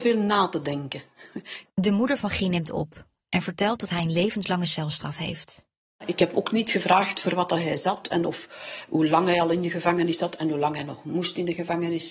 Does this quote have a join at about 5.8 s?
no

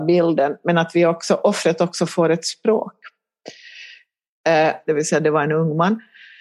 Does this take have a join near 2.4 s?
no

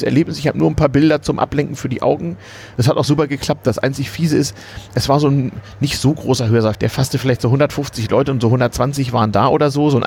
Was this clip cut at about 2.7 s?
yes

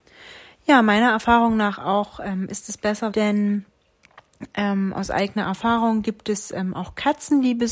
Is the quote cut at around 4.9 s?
no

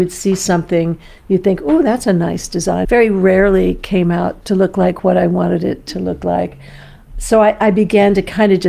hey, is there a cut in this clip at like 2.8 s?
yes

